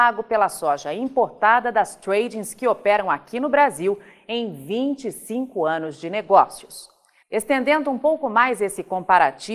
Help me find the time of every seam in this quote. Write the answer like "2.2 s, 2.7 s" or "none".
7.2 s